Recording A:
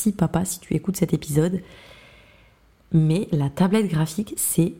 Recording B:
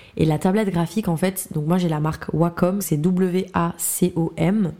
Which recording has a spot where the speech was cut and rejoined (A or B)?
B